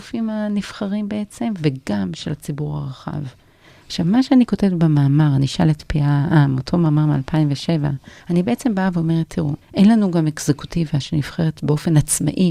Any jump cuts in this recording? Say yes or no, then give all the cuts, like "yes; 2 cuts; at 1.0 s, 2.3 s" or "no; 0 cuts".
yes; 3 cuts; at 3.8 s, 8.2 s, 9.6 s